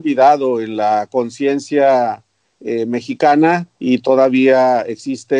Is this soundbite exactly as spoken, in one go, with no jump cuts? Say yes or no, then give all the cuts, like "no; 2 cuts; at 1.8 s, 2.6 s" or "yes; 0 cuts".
no; 1 cut; at 3.7 s